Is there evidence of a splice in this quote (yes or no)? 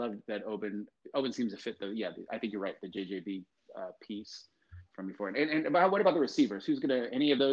no